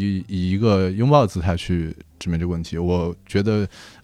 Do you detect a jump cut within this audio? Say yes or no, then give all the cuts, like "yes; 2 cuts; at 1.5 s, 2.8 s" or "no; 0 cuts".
no; 0 cuts